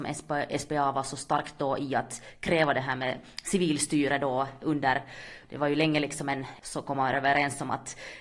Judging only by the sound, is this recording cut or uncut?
cut